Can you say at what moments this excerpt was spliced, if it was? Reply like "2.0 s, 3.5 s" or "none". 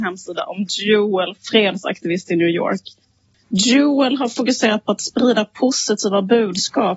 1.4 s